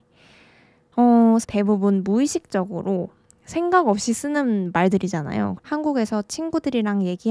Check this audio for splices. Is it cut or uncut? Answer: cut